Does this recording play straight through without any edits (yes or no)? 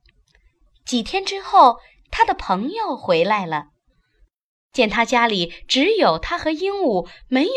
yes